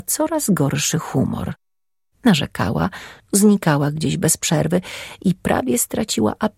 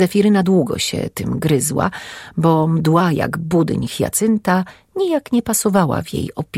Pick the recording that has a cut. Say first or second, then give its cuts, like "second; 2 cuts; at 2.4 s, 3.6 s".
first; 1 cut; at 3.2 s